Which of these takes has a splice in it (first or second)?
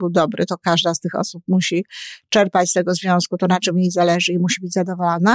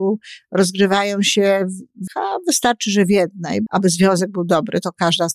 second